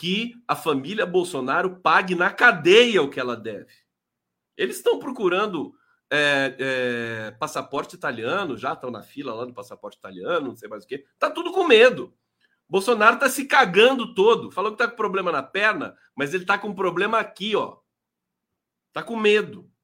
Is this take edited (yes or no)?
no